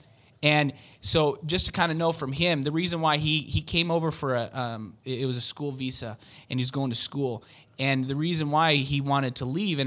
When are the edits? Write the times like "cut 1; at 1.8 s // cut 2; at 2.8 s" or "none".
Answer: none